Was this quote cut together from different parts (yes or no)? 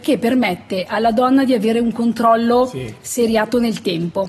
no